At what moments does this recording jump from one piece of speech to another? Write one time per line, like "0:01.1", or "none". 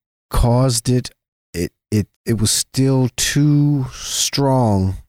0:02.1

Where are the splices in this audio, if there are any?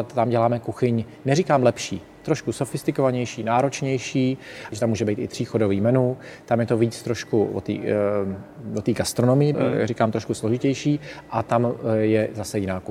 0:04.7
0:09.5

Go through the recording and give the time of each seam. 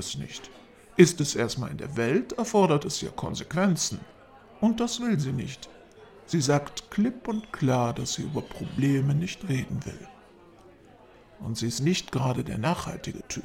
none

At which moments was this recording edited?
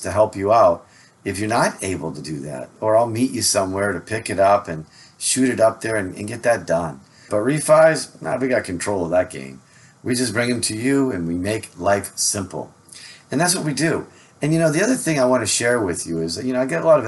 0:07.3

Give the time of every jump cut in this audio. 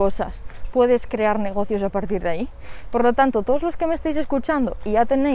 none

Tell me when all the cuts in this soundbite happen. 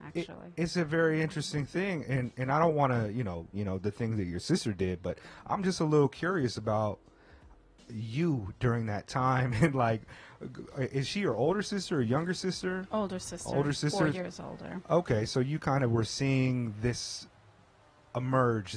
0:03.5

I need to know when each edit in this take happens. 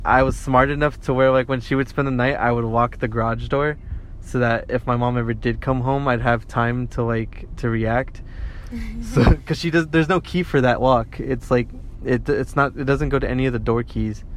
none

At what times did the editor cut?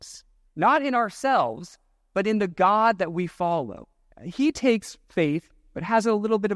0:04.1

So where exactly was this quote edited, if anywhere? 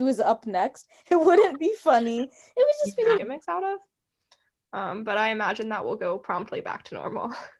0:01.0
0:03.2

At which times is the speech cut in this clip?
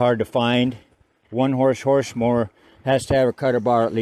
none

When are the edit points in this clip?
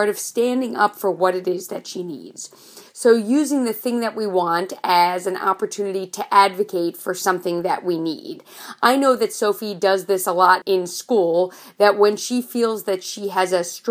0:02.9
0:10.6

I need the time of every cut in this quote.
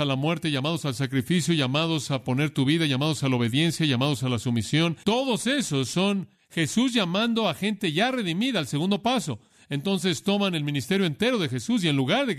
0:05.0

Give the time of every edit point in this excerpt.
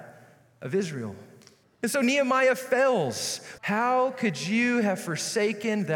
0:01.6
0:03.6

